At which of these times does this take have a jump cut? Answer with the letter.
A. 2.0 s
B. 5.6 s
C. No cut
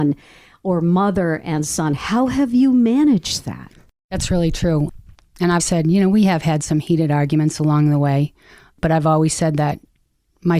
B